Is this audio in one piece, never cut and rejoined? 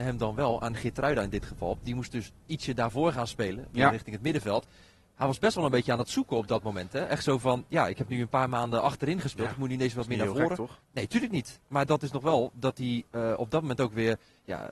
no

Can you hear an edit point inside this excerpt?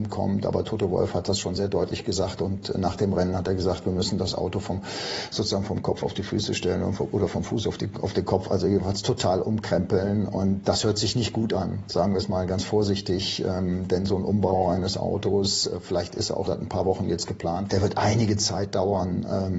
yes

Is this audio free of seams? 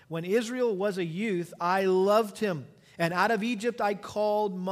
yes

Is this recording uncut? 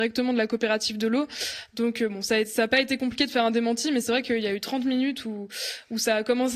yes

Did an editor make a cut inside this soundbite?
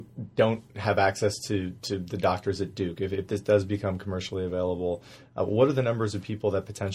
no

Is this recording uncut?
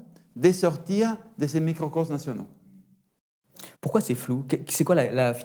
no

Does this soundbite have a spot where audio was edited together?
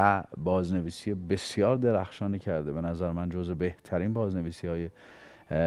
no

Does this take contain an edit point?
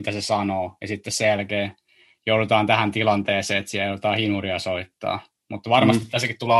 no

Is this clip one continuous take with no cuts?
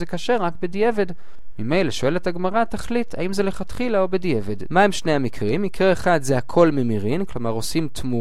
no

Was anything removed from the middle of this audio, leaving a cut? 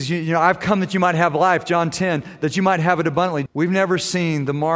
yes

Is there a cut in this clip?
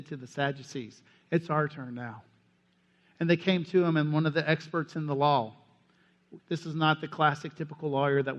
yes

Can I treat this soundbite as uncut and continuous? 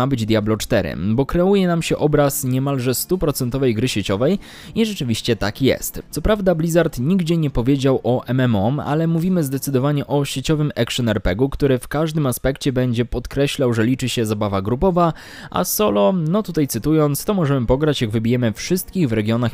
yes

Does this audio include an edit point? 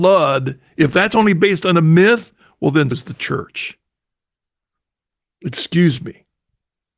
yes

